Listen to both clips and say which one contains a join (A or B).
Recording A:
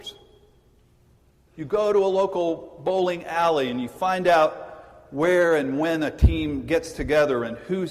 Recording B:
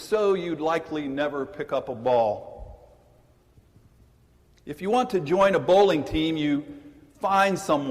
A